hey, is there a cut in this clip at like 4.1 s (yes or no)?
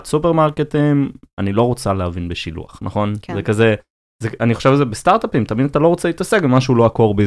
no